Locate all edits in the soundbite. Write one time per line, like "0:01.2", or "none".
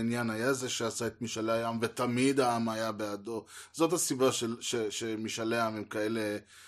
none